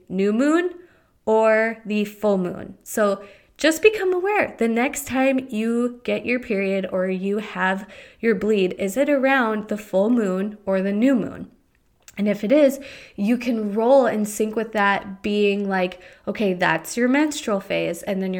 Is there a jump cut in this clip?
no; 0 cuts

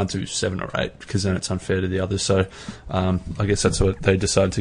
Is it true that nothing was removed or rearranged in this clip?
yes; 0 cuts

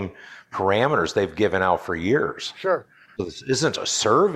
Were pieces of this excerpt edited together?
yes; 1 cut; at 3.2 s

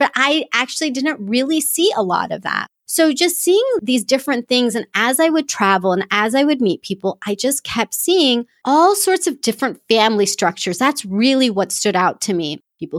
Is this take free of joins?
yes; 0 cuts

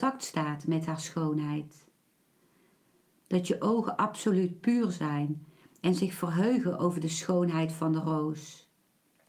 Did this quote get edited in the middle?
no; 0 cuts

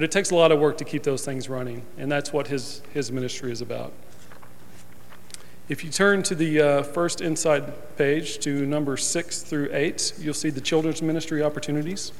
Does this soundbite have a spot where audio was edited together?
no; 0 cuts

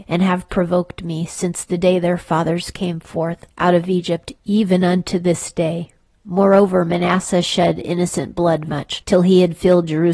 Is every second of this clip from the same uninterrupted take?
no; 2 cuts; at 6.2 s, 8.7 s

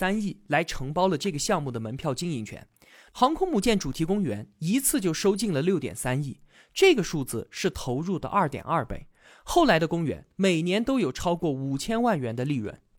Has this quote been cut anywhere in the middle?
no; 0 cuts

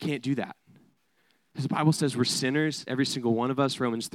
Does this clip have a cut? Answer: no; 0 cuts

